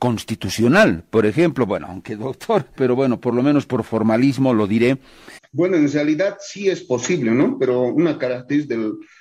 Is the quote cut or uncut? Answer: cut